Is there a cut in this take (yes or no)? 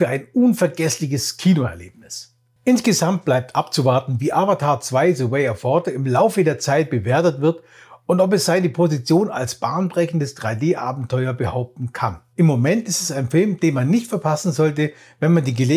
yes